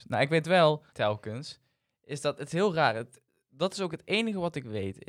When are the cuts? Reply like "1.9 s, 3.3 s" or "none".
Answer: 0.9 s